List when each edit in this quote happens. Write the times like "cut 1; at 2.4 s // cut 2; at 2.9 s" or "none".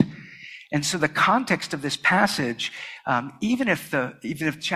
none

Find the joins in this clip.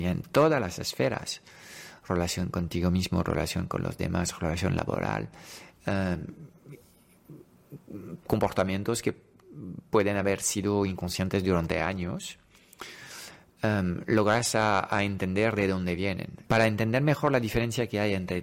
cut 1; at 16.4 s

